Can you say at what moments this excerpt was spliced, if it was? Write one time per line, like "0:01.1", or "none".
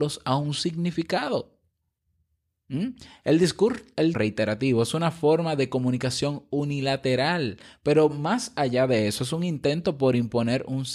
0:04.1